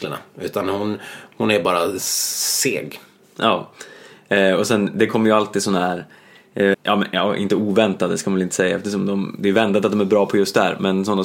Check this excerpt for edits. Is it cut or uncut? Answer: cut